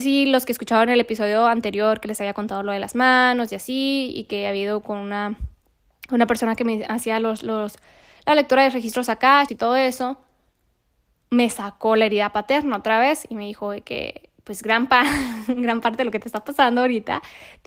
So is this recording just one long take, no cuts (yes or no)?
no